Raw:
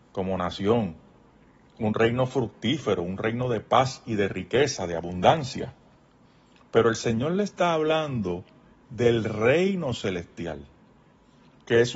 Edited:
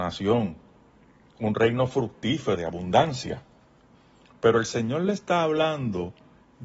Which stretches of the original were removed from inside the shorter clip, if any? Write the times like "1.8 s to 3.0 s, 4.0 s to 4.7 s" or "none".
3.0 s to 4.9 s